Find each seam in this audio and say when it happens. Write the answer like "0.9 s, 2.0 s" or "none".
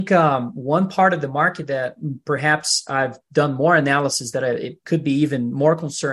4.8 s